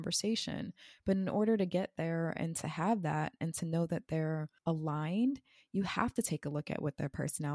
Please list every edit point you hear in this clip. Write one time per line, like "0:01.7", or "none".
0:04.6